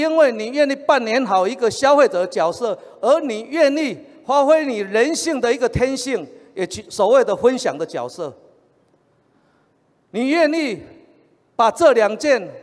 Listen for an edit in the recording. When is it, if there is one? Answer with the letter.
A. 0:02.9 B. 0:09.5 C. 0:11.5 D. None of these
D